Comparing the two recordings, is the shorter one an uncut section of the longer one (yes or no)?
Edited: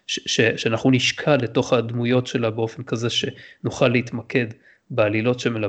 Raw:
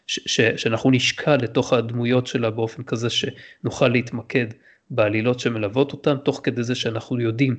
yes